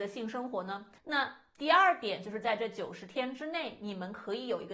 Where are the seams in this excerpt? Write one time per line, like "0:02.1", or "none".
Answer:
0:01.0